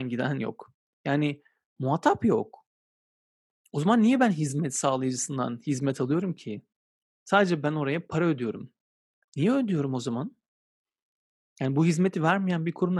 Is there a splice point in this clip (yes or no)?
no